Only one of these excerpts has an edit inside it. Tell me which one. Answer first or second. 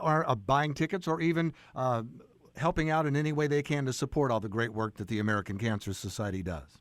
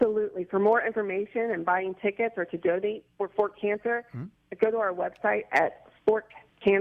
second